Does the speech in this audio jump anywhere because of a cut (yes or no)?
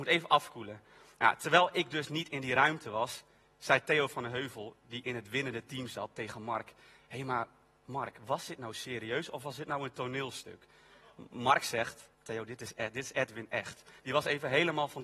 yes